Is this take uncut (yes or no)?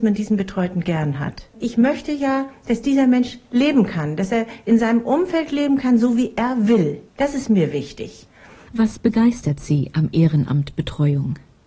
no